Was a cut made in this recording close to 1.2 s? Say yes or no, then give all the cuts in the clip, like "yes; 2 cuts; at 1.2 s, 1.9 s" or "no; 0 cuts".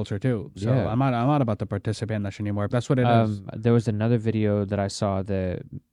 no; 1 cut; at 2.7 s